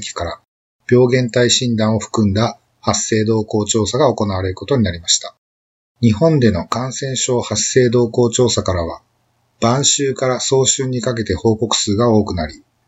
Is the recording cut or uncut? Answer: cut